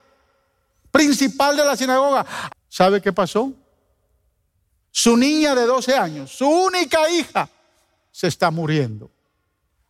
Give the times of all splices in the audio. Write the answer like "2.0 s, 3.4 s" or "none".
2.5 s